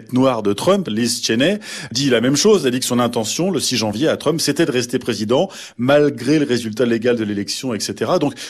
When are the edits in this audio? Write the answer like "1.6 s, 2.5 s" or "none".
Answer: none